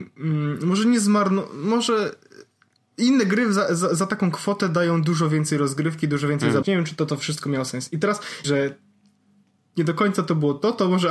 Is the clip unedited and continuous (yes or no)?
no